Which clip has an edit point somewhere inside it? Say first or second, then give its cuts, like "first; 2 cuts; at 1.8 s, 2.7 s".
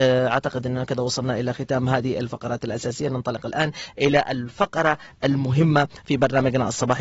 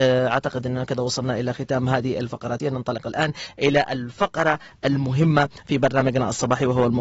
second; 1 cut; at 2.6 s